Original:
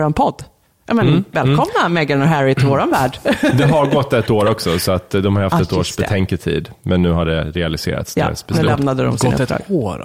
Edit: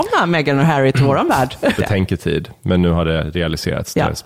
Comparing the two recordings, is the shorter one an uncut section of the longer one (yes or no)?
no